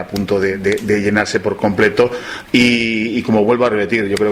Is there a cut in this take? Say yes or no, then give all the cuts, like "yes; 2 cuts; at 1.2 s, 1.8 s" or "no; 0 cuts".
yes; 1 cut; at 2.4 s